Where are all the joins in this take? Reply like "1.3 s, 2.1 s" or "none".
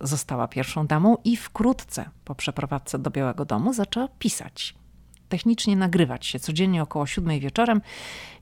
none